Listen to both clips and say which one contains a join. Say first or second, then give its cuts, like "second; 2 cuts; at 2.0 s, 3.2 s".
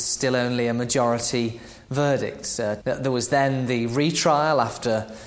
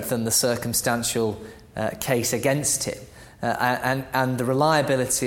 first; 1 cut; at 2.8 s